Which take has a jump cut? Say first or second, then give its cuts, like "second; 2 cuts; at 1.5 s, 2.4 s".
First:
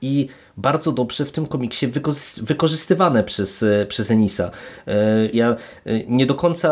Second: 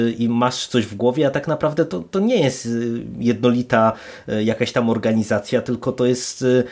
first; 1 cut; at 5.3 s